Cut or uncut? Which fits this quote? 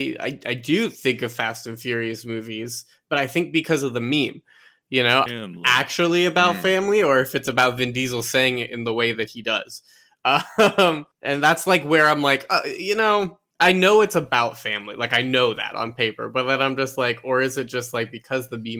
cut